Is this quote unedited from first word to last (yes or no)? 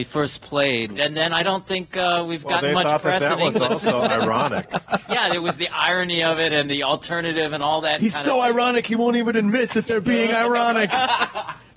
no